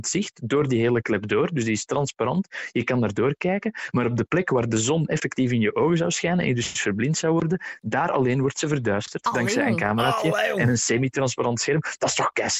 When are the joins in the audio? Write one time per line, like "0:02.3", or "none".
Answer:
none